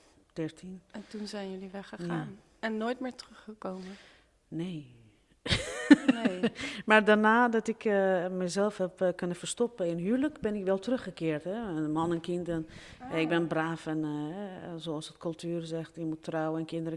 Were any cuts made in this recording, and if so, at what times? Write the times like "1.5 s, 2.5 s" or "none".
none